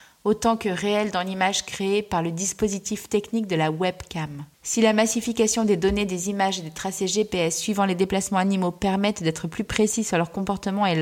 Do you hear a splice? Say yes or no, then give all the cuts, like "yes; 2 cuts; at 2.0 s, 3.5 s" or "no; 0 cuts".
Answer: yes; 1 cut; at 4.5 s